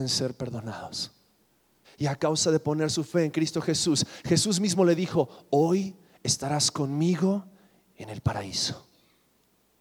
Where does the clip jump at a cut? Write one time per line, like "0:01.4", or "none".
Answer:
0:01.8